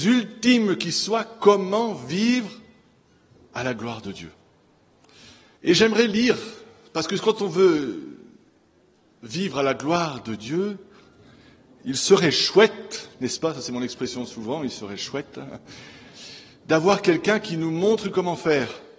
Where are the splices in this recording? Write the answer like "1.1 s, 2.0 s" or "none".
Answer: 5.6 s